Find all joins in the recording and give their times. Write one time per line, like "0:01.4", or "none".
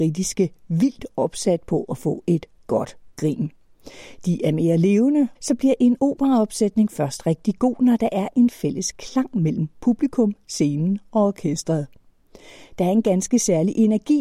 0:05.3